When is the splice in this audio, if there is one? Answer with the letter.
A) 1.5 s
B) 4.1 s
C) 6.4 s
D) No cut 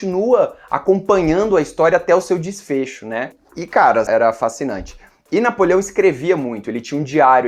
B